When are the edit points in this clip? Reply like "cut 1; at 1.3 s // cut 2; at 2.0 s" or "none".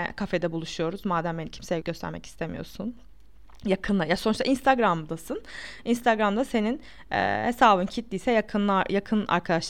cut 1; at 1.8 s